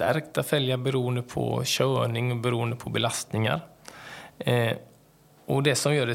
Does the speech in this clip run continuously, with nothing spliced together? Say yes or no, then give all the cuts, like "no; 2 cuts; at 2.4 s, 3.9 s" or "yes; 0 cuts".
yes; 0 cuts